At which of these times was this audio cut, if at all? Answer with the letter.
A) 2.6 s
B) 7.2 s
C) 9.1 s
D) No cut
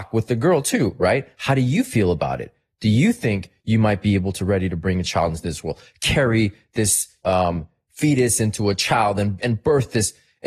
B